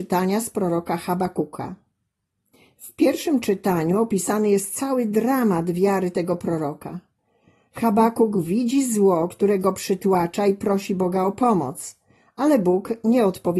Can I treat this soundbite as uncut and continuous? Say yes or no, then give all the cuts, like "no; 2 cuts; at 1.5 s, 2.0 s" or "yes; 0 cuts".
yes; 0 cuts